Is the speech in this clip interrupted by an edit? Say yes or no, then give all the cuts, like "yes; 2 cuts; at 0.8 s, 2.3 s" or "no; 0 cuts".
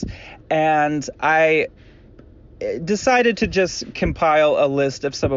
no; 0 cuts